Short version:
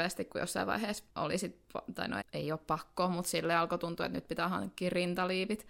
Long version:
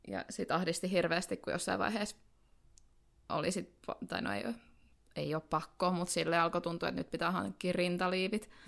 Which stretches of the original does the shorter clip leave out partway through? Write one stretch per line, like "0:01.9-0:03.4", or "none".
0:02.2-0:03.2
0:04.3-0:05.0